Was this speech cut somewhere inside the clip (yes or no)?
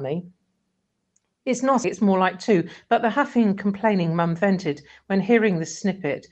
yes